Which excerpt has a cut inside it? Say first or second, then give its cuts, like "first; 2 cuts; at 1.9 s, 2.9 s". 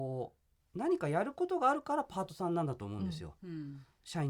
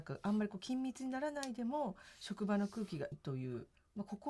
second; 1 cut; at 3.1 s